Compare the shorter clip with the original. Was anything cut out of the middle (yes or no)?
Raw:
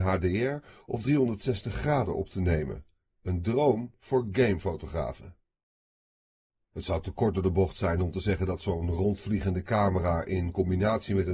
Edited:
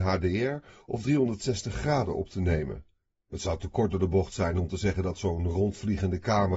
yes